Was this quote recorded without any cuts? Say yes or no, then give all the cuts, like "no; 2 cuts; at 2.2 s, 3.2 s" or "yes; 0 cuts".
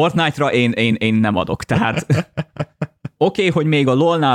yes; 0 cuts